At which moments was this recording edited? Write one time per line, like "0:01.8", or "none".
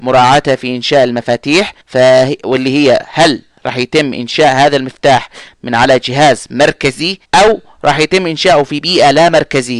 0:01.8
0:07.2